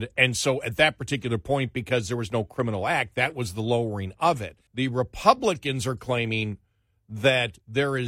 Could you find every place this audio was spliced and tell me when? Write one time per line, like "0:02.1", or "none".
0:04.7